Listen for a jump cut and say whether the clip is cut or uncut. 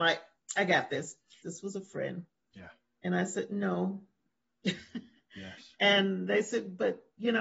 cut